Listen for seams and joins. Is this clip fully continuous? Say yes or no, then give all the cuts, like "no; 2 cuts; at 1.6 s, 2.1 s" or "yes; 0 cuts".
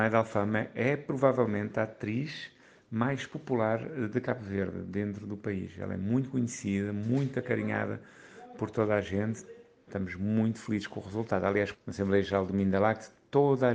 no; 2 cuts; at 9.9 s, 11.7 s